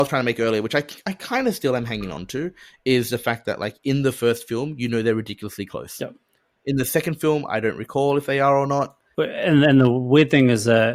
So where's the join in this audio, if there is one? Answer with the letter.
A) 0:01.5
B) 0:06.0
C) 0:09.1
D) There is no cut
C